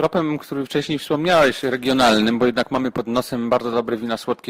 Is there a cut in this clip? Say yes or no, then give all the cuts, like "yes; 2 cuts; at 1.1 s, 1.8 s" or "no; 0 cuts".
no; 0 cuts